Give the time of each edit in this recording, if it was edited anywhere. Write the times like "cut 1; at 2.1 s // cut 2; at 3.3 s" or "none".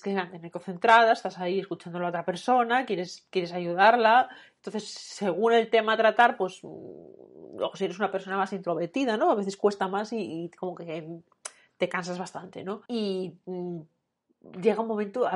cut 1; at 12.9 s